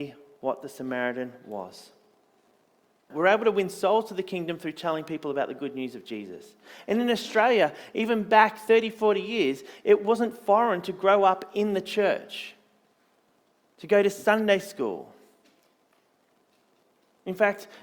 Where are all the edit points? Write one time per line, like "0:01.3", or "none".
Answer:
0:03.1